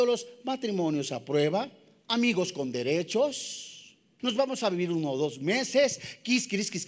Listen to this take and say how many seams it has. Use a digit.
1